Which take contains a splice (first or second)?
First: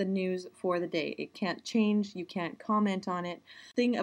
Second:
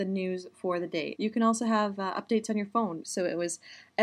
second